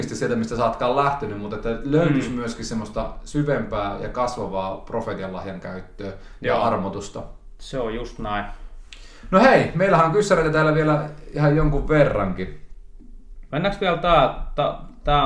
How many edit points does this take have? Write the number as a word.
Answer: one